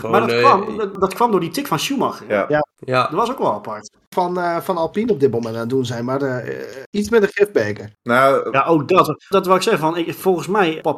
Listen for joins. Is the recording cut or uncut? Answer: cut